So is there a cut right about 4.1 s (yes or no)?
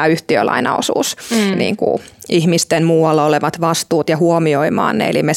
no